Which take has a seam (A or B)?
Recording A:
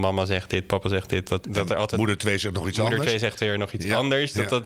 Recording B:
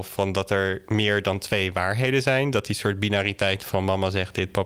A